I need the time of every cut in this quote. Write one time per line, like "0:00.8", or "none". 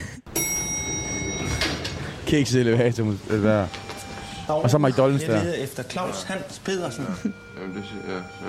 none